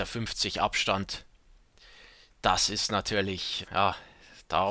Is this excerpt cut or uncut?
cut